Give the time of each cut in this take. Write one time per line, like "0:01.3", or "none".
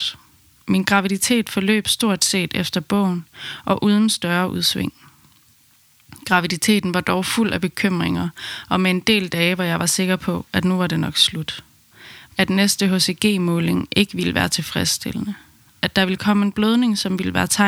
0:12.3